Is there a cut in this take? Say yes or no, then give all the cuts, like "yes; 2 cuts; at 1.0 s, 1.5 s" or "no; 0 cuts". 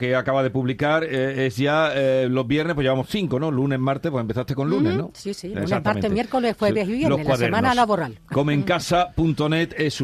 no; 0 cuts